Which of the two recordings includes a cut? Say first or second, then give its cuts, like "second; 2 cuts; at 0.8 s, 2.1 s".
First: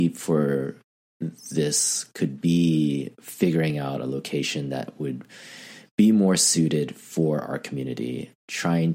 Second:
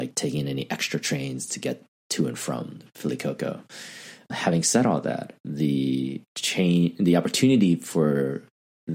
second; 2 cuts; at 4.3 s, 6.3 s